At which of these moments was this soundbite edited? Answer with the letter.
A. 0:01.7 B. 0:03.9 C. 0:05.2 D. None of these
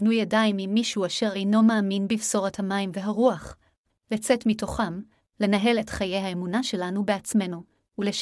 B